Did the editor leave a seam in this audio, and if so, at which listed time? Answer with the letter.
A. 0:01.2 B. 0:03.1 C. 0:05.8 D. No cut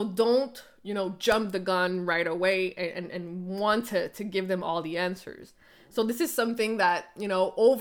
D